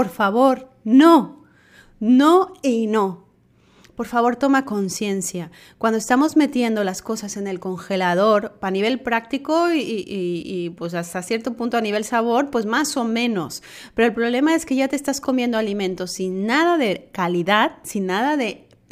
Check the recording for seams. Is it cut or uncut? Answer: uncut